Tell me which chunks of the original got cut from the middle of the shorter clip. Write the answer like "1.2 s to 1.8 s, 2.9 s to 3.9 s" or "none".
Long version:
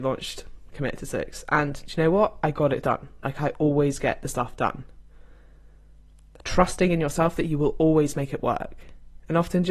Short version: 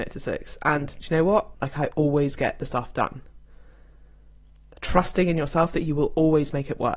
2.4 s to 3.2 s